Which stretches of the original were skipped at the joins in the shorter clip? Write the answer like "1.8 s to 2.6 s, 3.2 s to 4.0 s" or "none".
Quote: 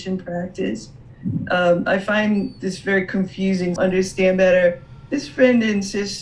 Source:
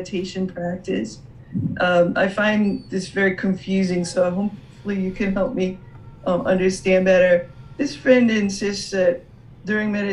4.1 s to 6.4 s